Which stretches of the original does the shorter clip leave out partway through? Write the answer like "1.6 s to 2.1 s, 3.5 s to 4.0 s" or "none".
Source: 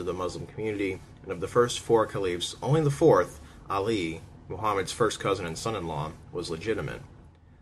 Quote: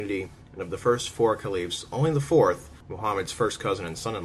3.5 s to 4.4 s

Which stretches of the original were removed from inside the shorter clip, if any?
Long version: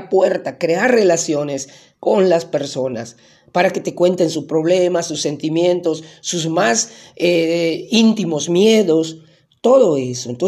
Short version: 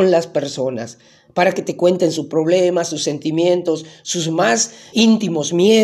7.1 s to 7.9 s

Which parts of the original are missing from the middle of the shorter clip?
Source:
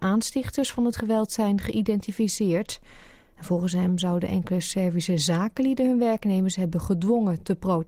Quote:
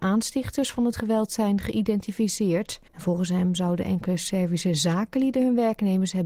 2.9 s to 3.3 s

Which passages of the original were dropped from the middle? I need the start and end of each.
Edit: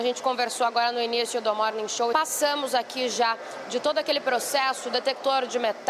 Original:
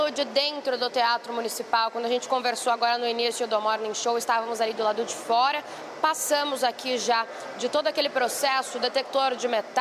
4.2 s to 6.0 s

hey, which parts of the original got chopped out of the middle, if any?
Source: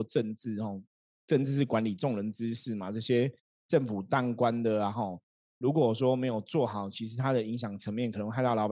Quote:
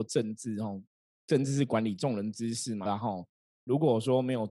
2.9 s to 4.8 s

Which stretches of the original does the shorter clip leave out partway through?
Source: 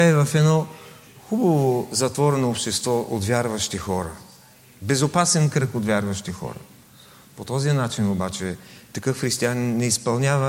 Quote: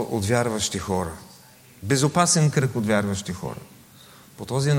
none

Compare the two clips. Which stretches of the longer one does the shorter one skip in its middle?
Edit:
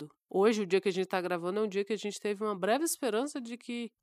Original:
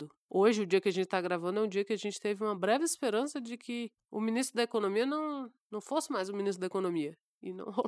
none

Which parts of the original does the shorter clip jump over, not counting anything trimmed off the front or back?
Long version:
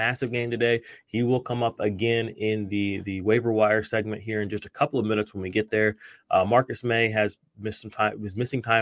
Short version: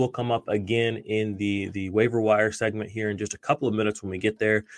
none

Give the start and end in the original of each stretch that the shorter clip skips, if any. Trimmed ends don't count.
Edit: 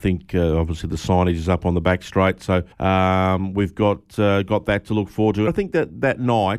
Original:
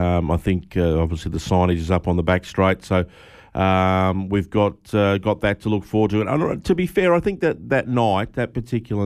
3.1 s to 3.5 s, 6.2 s to 7.2 s

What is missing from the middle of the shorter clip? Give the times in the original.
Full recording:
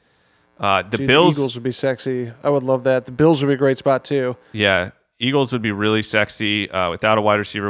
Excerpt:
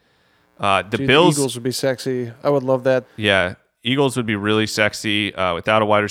3.0 s to 4.4 s

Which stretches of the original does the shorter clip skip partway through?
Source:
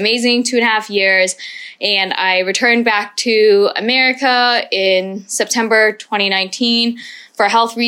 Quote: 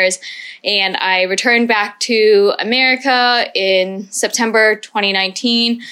none

